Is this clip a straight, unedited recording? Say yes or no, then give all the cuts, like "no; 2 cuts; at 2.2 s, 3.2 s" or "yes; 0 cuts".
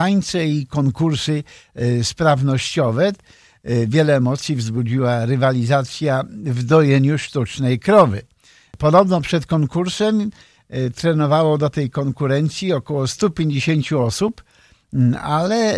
yes; 0 cuts